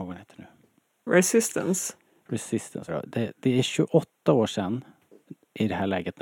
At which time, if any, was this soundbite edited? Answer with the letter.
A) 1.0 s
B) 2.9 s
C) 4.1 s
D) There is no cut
B